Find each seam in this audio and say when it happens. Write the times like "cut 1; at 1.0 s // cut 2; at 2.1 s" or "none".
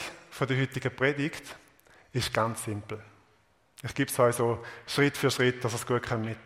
none